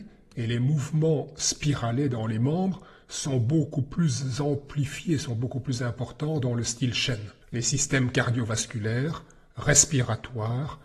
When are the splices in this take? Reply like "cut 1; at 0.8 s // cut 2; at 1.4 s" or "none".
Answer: cut 1; at 7.4 s